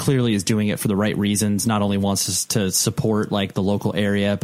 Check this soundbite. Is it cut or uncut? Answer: uncut